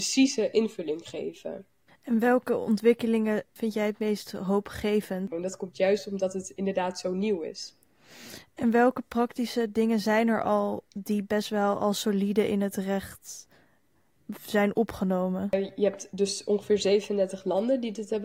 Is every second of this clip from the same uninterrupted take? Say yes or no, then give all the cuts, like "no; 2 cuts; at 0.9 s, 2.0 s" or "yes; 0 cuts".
no; 2 cuts; at 1.9 s, 5.3 s